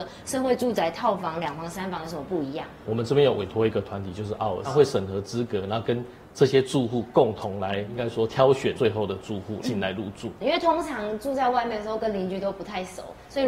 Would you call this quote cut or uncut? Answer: uncut